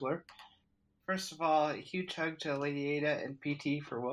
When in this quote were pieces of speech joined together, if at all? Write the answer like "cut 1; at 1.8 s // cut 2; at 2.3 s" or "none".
cut 1; at 1.0 s